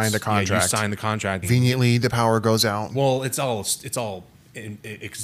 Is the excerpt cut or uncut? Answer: cut